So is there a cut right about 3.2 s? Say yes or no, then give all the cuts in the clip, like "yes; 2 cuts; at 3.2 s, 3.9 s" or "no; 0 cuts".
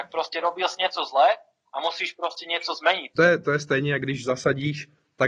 yes; 1 cut; at 3.2 s